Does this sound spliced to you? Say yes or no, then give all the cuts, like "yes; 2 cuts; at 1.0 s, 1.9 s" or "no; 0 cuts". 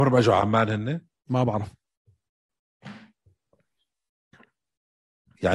no; 0 cuts